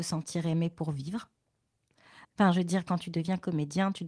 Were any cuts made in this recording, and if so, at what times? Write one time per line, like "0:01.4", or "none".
0:02.2